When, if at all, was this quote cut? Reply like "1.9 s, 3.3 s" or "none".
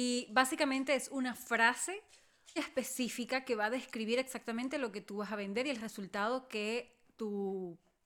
2.6 s